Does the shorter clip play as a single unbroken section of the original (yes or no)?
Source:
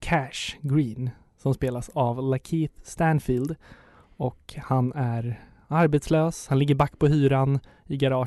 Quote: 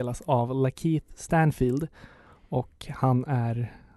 yes